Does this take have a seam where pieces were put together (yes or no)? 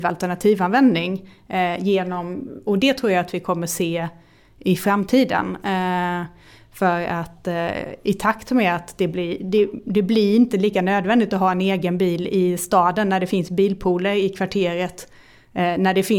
no